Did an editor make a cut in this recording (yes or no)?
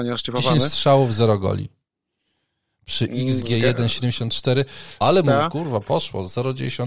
yes